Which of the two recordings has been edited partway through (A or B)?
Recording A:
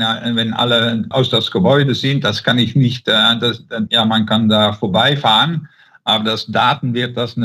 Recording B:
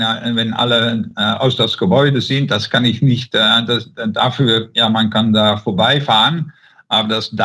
A